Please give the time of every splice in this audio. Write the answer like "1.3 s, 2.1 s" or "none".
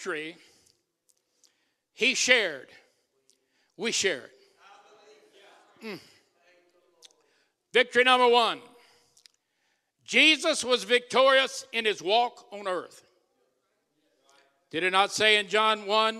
none